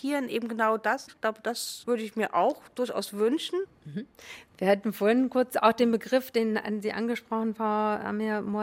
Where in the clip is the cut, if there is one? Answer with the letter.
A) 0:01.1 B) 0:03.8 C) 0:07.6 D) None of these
A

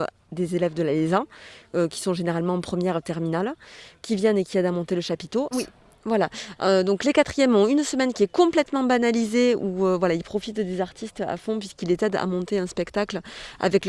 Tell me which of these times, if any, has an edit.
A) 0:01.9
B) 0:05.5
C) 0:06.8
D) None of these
B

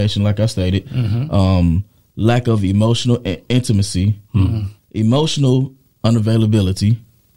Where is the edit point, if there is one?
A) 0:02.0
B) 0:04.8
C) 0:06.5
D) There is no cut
B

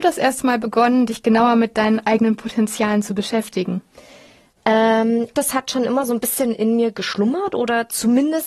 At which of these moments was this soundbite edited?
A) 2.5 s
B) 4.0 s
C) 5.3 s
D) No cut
C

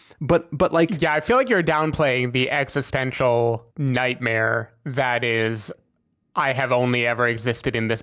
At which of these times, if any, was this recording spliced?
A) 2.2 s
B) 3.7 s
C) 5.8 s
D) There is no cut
B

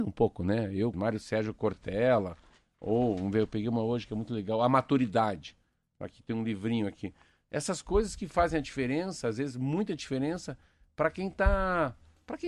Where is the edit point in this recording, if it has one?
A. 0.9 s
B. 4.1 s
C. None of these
A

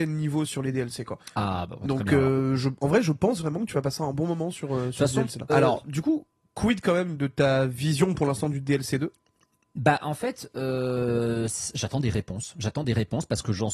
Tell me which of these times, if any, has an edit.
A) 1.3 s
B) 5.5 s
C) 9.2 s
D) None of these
B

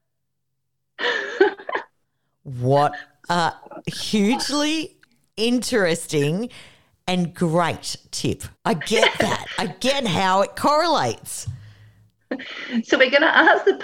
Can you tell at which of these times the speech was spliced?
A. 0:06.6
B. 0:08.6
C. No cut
B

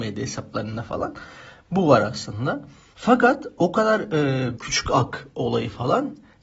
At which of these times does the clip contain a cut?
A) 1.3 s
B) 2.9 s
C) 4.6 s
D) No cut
C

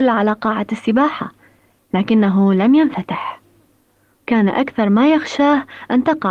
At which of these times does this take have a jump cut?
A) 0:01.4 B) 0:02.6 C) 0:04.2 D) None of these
C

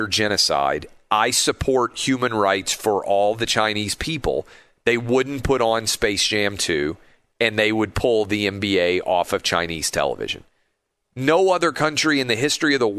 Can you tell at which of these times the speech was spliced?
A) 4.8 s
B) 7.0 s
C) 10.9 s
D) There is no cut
C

